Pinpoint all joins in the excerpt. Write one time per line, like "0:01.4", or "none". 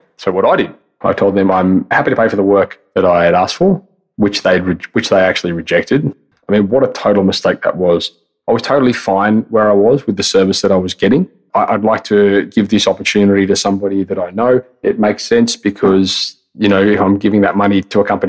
0:06.3
0:11.5